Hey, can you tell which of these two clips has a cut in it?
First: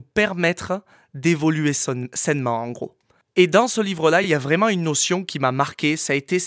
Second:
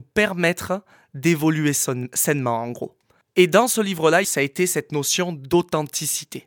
second; 1 cut; at 4.2 s

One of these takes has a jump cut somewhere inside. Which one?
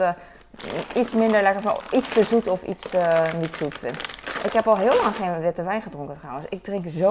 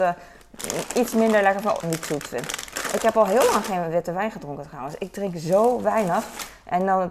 second; 1 cut; at 1.8 s

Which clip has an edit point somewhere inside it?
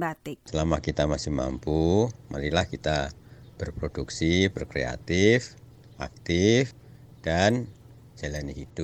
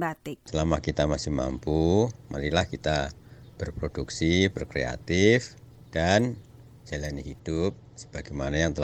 second; 1 cut; at 5.8 s

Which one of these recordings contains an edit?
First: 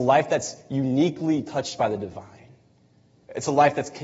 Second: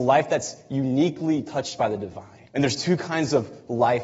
second; 1 cut; at 2.5 s

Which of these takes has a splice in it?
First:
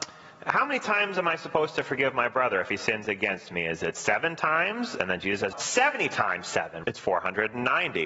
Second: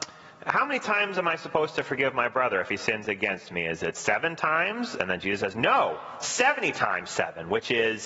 first; 2 cuts; at 5.5 s, 6.8 s

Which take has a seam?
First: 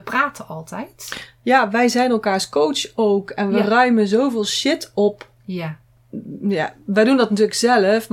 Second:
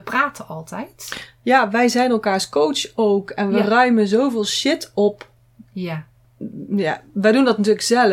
first; 1 cut; at 5.4 s

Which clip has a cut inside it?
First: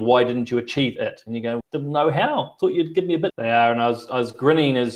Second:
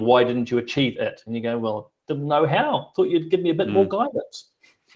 first; 2 cuts; at 1.6 s, 3.3 s

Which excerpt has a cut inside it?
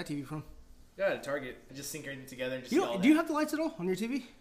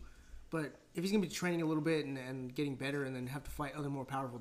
first; 1 cut; at 1.7 s

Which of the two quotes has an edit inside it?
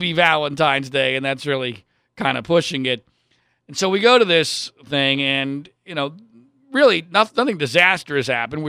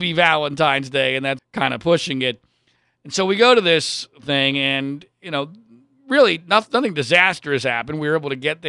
second; 1 cut; at 1.4 s

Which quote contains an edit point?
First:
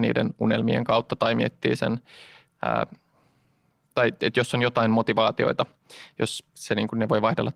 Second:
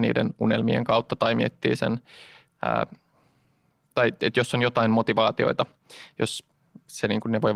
first; 1 cut; at 6.5 s

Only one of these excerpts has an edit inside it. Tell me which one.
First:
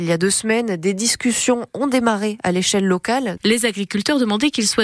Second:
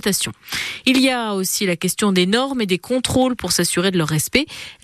first; 1 cut; at 3.4 s

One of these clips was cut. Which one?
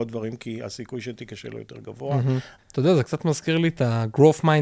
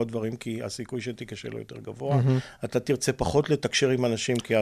first; 1 cut; at 2.6 s

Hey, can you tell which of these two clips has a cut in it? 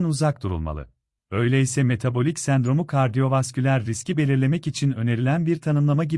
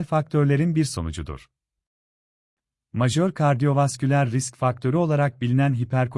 first; 1 cut; at 1.2 s

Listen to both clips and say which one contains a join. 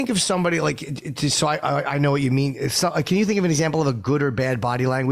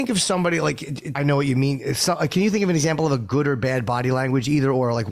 second; 1 cut; at 1.1 s

